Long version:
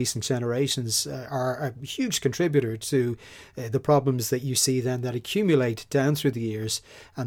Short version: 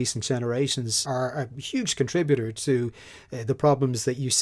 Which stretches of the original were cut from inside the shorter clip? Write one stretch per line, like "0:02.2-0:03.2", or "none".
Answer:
0:01.0-0:01.3